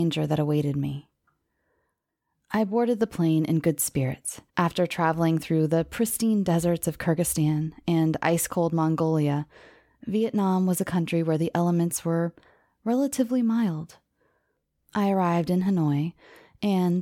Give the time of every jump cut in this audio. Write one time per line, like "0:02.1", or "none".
0:04.5

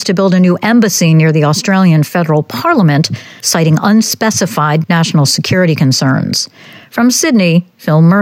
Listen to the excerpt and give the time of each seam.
none

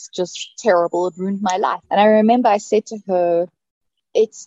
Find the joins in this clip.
0:01.8

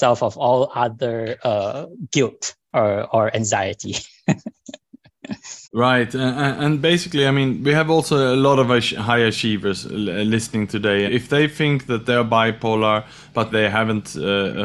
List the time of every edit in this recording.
0:05.6
0:11.1
0:13.5

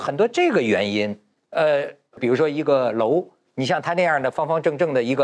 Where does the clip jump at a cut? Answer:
0:01.4

